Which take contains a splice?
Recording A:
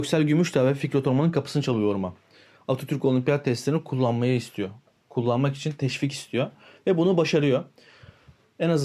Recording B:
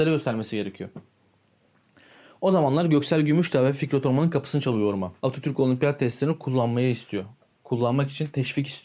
B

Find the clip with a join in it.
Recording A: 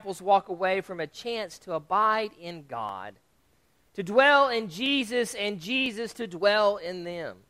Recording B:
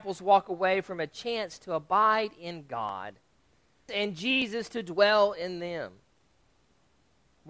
B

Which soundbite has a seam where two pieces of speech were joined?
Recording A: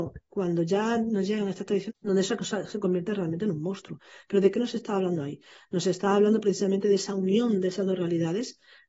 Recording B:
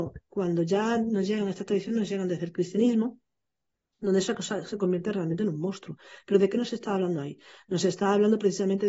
A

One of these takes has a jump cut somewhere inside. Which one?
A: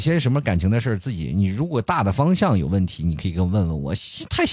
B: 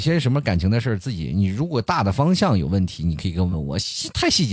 B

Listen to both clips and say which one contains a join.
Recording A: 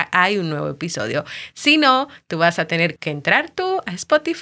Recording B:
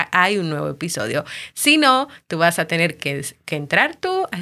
A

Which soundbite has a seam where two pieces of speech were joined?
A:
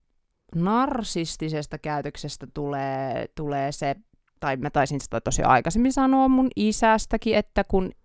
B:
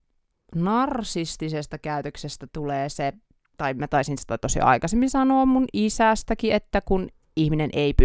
B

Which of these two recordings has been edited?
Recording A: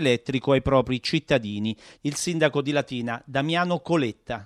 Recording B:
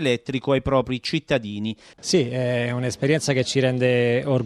B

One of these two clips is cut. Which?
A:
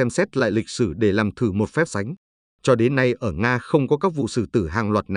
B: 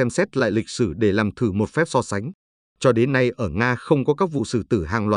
A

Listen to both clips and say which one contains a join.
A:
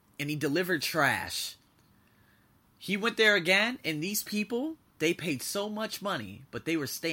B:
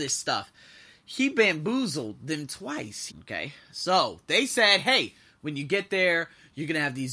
B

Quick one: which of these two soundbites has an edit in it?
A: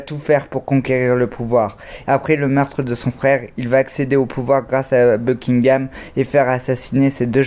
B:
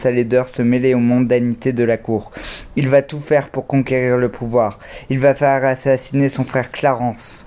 A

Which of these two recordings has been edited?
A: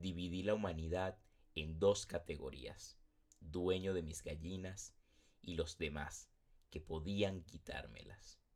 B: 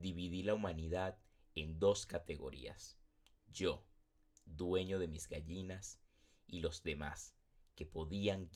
A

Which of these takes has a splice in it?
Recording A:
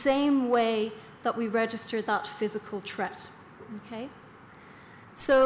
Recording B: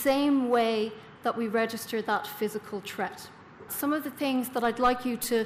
B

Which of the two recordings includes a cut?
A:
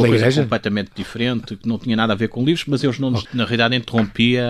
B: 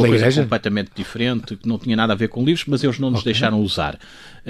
A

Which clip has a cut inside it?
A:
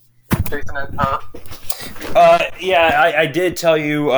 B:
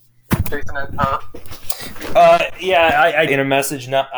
B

